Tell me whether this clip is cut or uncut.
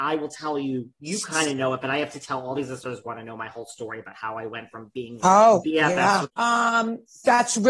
cut